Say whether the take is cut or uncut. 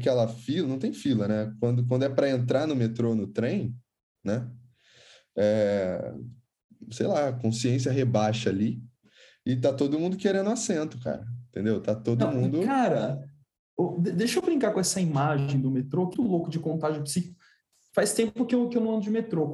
cut